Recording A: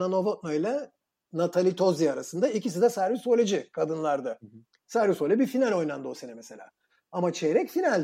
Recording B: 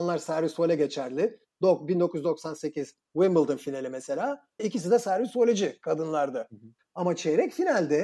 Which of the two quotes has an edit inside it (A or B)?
B